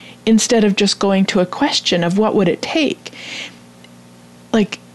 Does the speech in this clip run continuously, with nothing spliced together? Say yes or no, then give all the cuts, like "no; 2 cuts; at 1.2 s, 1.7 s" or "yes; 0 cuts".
yes; 0 cuts